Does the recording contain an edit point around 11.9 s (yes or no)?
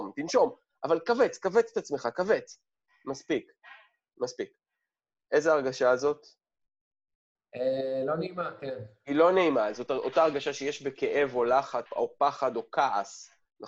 yes